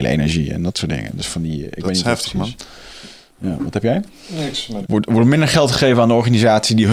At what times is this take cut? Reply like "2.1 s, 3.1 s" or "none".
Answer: 4.8 s